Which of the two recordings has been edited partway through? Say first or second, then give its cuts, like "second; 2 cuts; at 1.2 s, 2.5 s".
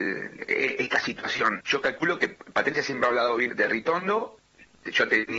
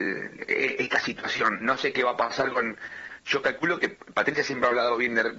first; 2 cuts; at 1.6 s, 3.5 s